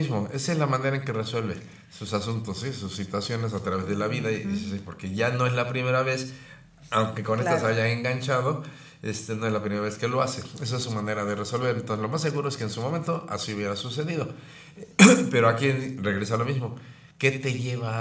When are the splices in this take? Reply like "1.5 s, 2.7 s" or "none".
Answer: 17.1 s